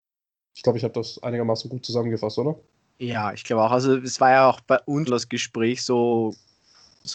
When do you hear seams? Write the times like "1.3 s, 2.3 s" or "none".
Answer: 5.1 s